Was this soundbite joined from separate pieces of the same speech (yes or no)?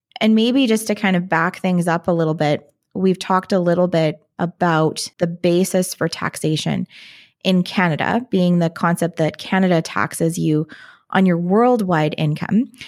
yes